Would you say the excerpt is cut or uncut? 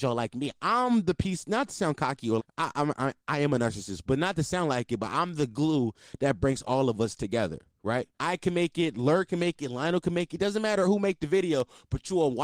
cut